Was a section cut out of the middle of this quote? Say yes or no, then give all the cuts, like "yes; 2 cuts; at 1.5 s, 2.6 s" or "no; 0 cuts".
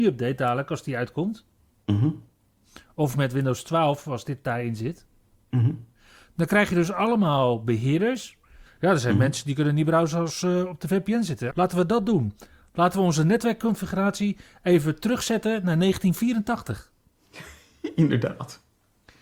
yes; 2 cuts; at 8.7 s, 11.5 s